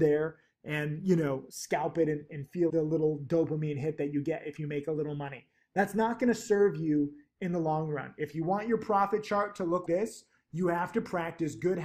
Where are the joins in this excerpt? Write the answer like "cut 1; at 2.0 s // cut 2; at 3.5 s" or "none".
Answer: cut 1; at 2.7 s // cut 2; at 9.9 s